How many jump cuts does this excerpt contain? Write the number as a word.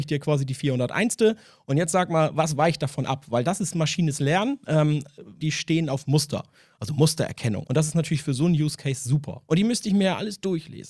three